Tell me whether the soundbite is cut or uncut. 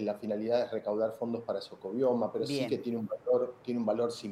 uncut